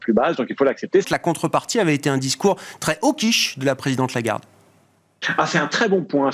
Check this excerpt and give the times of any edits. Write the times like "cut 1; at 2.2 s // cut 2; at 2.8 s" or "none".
cut 1; at 1.0 s